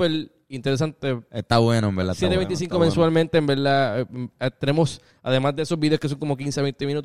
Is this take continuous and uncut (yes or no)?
yes